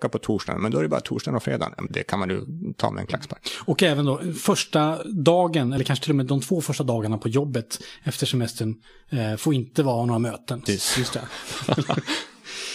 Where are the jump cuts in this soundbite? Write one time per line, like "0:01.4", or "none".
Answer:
0:01.9
0:10.7